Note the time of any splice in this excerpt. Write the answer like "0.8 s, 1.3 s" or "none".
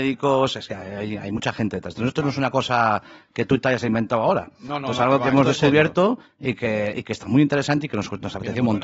none

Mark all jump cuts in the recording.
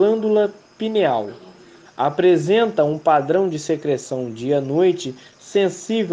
1.9 s

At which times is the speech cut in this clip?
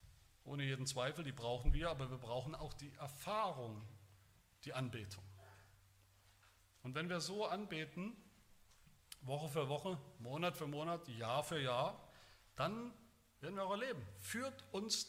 none

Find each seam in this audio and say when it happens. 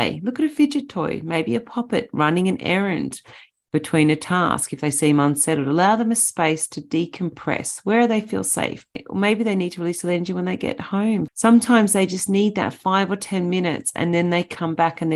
11.3 s

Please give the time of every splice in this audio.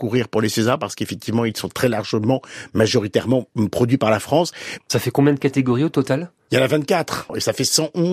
4.8 s

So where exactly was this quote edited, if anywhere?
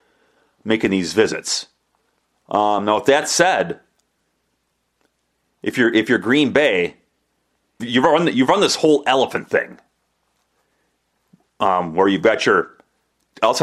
7.8 s

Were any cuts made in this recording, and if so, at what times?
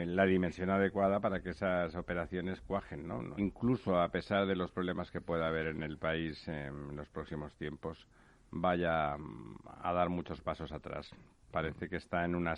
3.4 s

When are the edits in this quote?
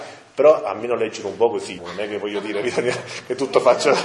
1.8 s

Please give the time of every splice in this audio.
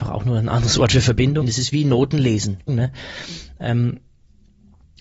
1.4 s, 2.7 s

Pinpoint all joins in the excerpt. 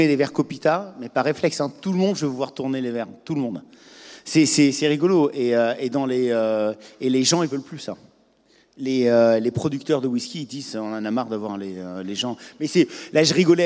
none

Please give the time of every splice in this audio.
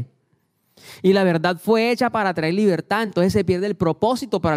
none

